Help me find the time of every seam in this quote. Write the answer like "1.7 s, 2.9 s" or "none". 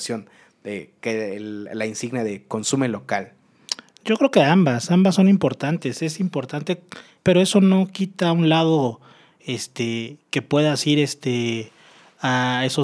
7.2 s